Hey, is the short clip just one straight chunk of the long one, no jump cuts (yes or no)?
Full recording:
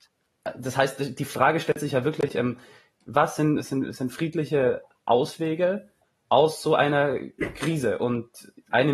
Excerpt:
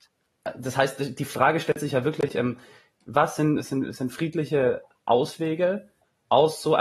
yes